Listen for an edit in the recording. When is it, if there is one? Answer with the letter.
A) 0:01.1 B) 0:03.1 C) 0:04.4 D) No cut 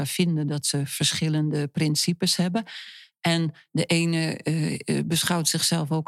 D